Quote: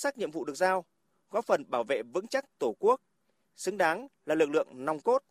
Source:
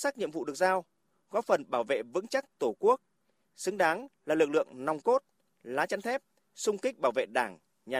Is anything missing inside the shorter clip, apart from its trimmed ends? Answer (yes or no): no